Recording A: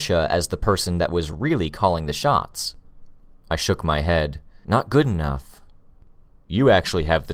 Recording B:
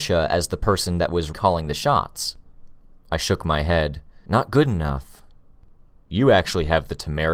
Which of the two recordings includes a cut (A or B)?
B